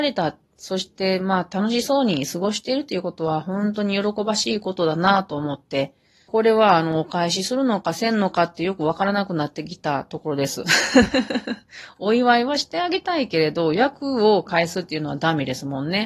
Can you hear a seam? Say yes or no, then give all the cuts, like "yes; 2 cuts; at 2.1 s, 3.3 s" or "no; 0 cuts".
yes; 1 cut; at 6.3 s